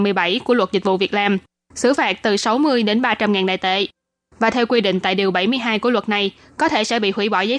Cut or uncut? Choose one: uncut